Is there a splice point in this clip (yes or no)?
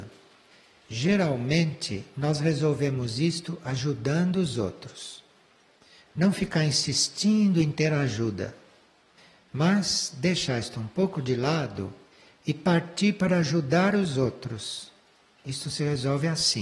no